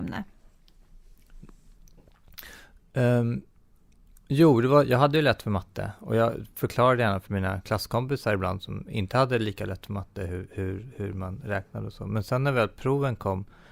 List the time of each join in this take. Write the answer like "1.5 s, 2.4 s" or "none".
none